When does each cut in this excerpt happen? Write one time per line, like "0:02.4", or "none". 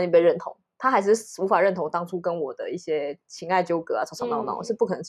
none